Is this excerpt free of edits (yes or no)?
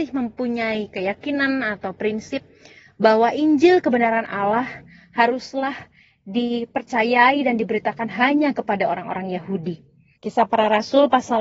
no